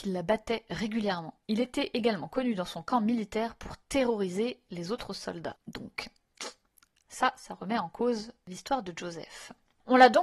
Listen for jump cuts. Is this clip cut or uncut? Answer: cut